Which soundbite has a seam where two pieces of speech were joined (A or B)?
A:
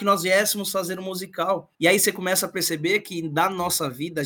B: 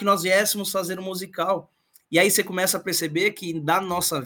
A